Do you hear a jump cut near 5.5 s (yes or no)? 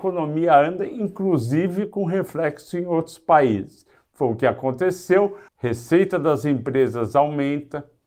yes